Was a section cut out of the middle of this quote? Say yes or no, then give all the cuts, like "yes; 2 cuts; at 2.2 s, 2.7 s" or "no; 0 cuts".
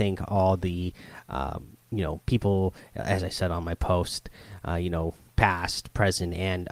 yes; 1 cut; at 1.8 s